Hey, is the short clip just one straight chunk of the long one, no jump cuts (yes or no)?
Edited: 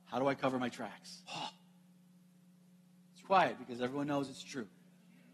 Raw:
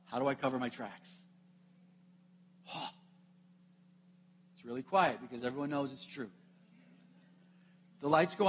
no